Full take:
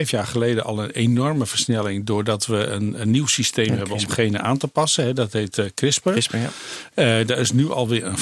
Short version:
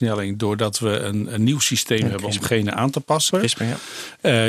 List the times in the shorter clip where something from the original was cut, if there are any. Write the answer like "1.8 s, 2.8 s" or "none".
3.3 s